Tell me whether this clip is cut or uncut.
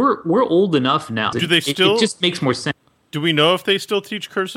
cut